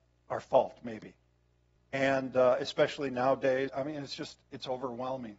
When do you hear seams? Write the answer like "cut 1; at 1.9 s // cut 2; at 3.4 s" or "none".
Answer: cut 1; at 1.8 s // cut 2; at 3.7 s